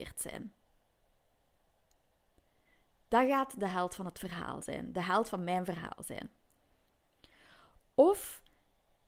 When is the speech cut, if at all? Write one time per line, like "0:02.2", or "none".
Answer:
none